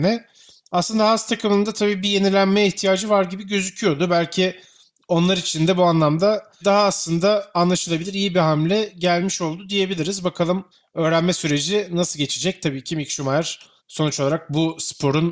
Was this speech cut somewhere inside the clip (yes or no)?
no